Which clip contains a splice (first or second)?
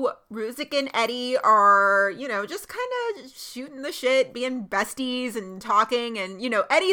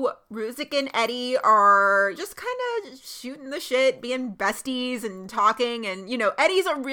second